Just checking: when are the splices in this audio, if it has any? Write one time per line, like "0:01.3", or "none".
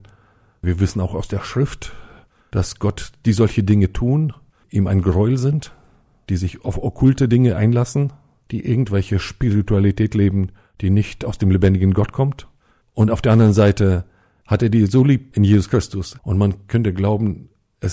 0:16.2